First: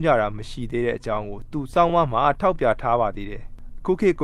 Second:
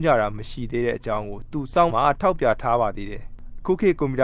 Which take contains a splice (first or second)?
second